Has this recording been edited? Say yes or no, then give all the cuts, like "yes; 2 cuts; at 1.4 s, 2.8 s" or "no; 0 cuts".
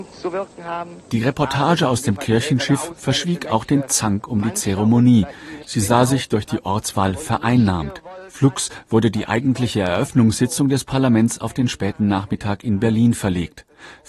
yes; 1 cut; at 5.6 s